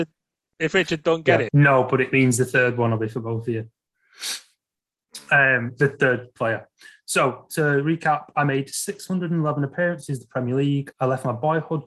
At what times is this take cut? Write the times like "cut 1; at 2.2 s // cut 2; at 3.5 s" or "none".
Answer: cut 1; at 1.5 s // cut 2; at 10.9 s